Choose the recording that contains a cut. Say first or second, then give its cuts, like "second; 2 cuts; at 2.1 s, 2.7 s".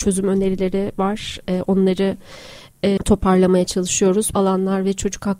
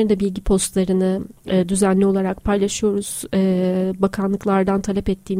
first; 2 cuts; at 3.0 s, 4.3 s